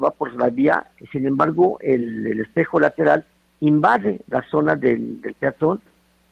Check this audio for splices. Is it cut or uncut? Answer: uncut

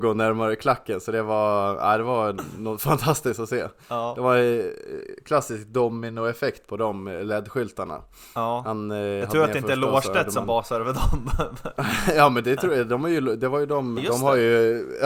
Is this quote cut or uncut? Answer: cut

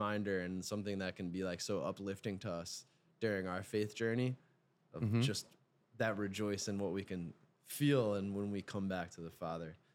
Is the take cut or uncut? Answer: uncut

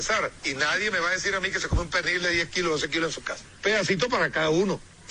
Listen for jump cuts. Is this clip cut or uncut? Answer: cut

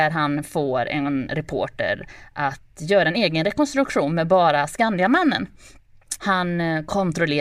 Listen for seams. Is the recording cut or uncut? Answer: cut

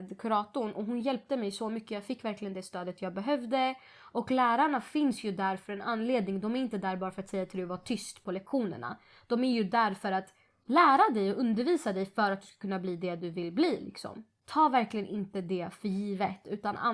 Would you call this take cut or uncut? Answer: uncut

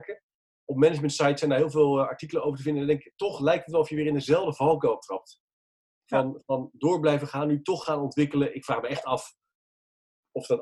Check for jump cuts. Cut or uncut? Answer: uncut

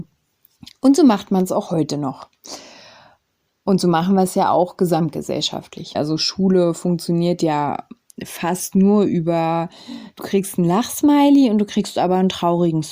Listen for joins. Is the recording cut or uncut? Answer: cut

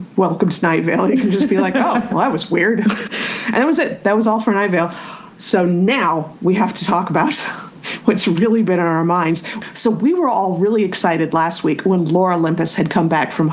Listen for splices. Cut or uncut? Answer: uncut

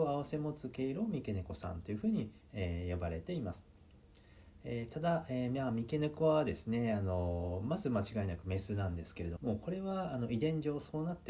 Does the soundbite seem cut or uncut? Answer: cut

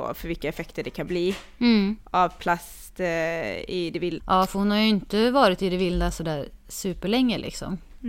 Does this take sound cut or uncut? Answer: cut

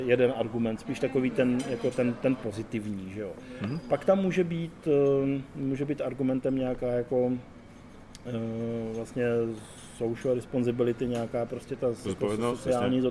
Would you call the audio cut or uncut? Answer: uncut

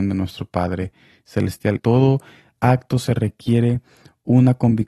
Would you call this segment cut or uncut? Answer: cut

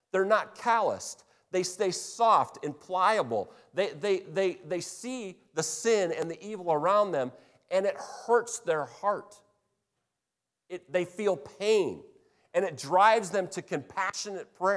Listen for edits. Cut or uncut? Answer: uncut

